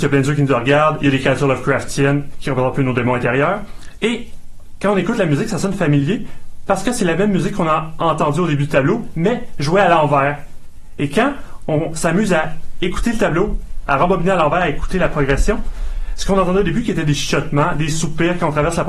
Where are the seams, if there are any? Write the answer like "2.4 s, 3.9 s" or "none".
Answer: none

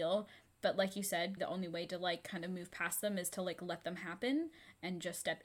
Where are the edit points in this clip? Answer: 1.4 s

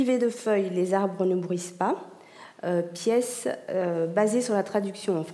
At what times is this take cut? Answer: none

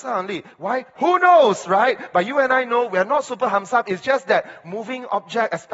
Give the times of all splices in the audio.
0.9 s

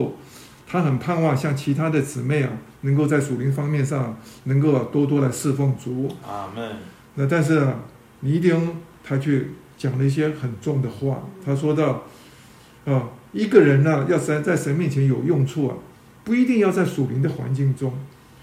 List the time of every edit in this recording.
none

